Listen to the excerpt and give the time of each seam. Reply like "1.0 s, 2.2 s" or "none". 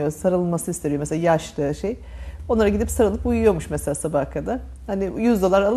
none